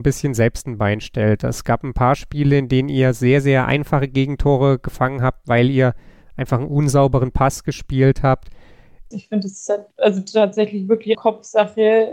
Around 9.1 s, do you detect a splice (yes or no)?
yes